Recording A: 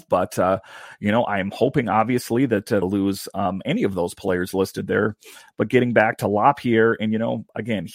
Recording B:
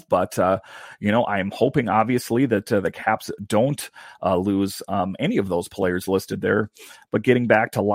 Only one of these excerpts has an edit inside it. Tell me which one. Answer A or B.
A